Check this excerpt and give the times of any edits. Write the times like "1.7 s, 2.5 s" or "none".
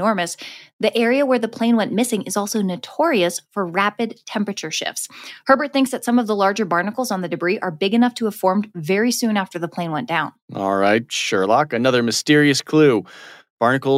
10.4 s